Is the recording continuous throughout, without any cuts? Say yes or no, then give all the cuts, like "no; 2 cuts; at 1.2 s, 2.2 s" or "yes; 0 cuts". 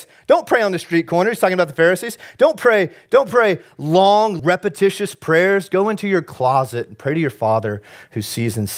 no; 1 cut; at 4.4 s